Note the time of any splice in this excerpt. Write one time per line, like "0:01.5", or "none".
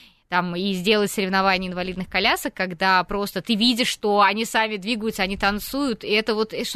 none

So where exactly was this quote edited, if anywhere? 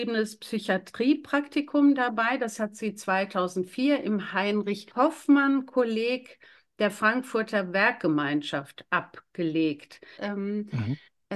0:04.9
0:10.2

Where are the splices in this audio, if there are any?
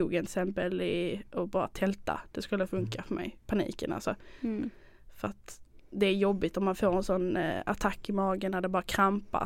none

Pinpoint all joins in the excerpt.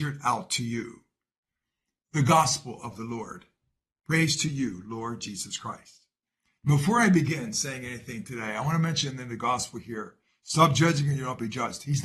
none

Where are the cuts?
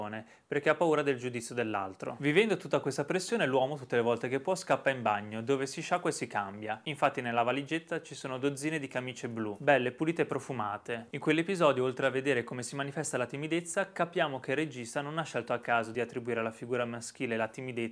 0:11.1

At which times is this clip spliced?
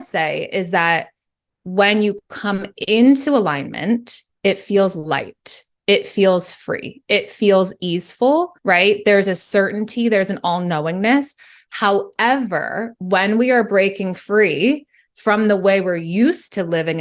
0:08.6

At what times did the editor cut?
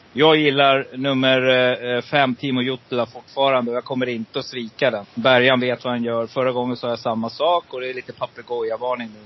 0:05.0

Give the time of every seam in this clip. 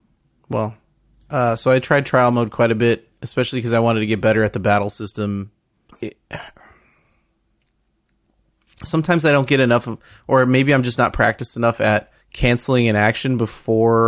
0:05.9
0:12.2

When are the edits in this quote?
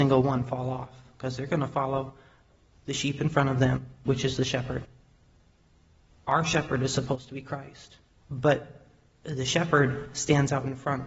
0:04.1
0:08.2

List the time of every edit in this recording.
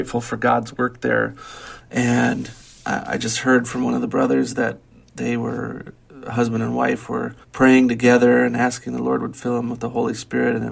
0:01.8
0:07.4

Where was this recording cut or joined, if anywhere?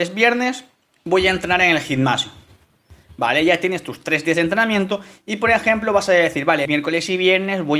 0:06.7

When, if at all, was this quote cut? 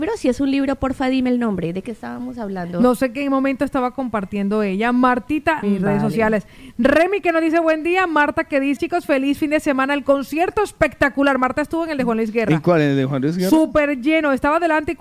0:05.6
0:08.8

